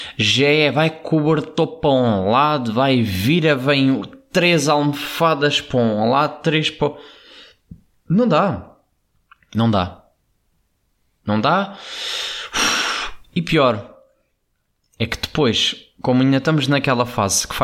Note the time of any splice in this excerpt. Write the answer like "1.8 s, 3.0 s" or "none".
none